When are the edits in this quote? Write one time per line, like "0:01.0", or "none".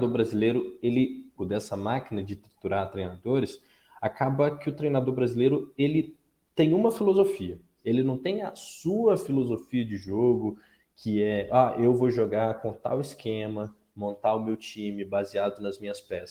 0:01.4
0:07.8